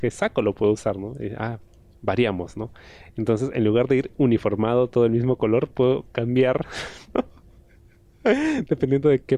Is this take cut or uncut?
uncut